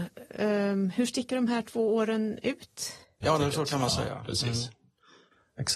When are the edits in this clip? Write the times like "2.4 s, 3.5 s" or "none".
3.2 s